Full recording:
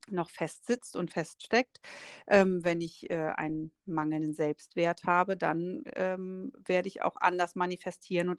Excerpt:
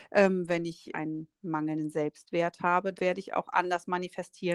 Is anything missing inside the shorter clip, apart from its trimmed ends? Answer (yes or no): yes